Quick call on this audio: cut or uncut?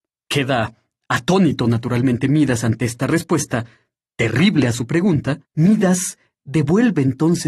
cut